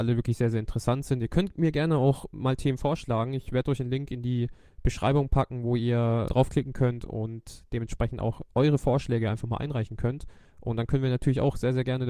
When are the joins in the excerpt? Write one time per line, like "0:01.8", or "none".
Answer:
0:06.3